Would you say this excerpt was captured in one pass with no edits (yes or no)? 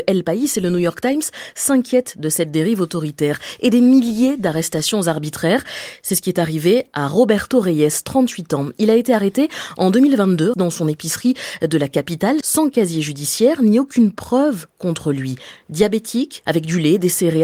no